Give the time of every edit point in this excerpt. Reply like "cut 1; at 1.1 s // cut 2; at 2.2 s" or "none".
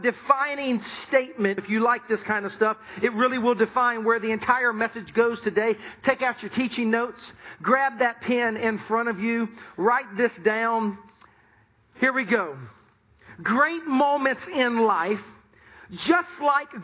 cut 1; at 1.6 s